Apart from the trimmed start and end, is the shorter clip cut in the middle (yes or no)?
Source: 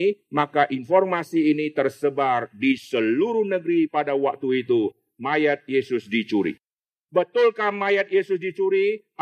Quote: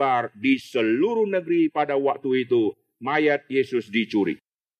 no